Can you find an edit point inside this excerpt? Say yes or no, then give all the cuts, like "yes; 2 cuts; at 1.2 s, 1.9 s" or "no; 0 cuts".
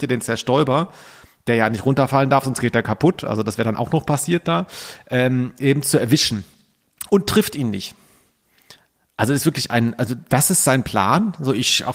no; 0 cuts